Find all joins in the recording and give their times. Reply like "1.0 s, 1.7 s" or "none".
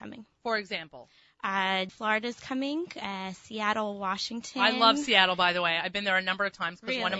1.9 s